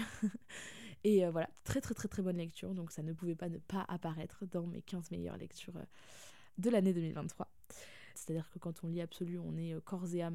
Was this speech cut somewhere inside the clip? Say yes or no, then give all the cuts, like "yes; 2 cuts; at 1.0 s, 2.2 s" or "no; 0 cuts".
yes; 1 cut; at 8.1 s